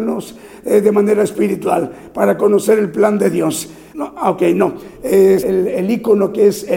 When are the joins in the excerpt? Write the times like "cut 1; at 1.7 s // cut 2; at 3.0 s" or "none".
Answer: cut 1; at 3.9 s // cut 2; at 5.4 s